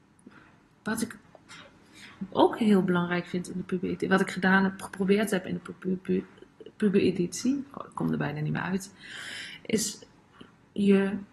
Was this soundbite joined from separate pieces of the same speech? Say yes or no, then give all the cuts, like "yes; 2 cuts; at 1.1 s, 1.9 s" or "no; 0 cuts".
no; 0 cuts